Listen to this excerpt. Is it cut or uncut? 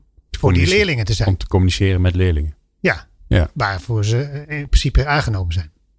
uncut